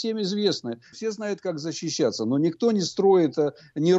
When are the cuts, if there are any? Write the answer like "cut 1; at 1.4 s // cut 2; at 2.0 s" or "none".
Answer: cut 1; at 0.9 s